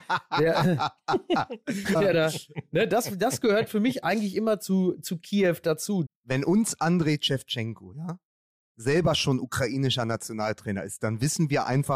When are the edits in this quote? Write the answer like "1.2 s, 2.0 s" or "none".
1.9 s, 6.1 s